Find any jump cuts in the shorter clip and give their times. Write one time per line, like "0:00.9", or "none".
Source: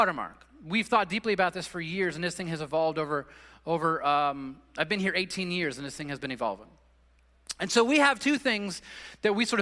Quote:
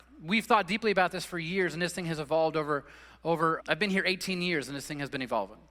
0:03.6